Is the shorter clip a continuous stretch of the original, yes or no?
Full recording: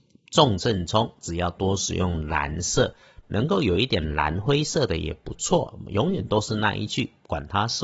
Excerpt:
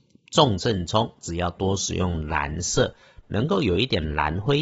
yes